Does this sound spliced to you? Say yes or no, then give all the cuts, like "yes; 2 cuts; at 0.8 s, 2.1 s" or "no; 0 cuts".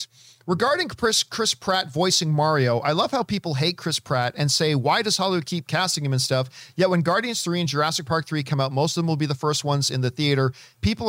no; 0 cuts